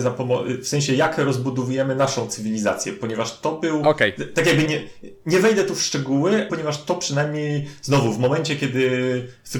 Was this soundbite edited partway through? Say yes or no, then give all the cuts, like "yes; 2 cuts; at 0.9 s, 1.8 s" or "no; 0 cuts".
yes; 2 cuts; at 4.7 s, 6.5 s